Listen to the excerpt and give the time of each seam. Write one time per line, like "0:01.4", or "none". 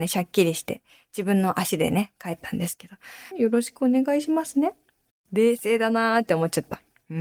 0:03.3
0:05.1